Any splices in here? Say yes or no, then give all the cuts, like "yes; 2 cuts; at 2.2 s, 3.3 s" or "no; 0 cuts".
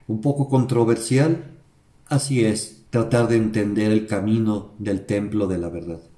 no; 0 cuts